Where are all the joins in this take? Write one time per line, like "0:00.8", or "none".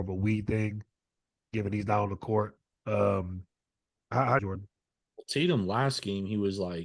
0:02.8
0:04.4